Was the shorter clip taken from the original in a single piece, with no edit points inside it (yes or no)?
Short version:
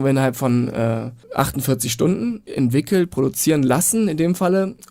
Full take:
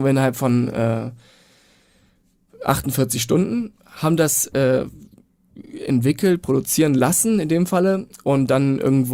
no